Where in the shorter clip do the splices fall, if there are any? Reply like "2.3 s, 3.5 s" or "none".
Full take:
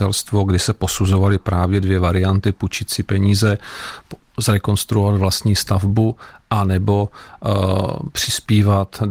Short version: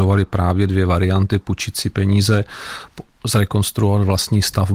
none